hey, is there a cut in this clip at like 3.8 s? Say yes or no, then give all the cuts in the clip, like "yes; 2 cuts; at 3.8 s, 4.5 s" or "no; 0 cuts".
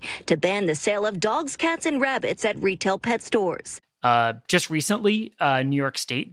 yes; 1 cut; at 3.8 s